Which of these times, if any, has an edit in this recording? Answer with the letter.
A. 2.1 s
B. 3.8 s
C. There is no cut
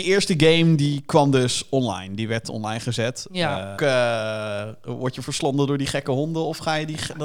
B